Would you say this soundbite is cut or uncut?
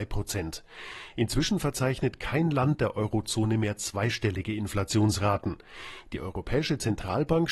uncut